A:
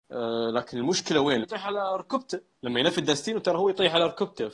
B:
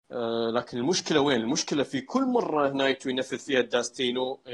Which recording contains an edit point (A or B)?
A